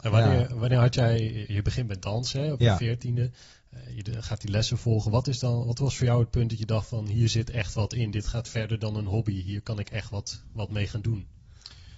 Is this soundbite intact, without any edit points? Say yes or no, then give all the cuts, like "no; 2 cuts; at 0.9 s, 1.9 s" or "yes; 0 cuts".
yes; 0 cuts